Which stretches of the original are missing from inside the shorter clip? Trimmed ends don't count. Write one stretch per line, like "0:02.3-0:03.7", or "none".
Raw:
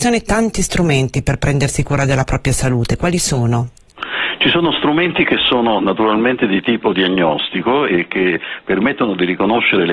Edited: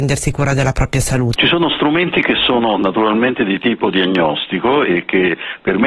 0:02.9-0:04.4